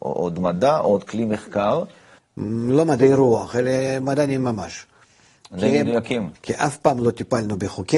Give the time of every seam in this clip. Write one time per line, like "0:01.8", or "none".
0:02.2
0:06.4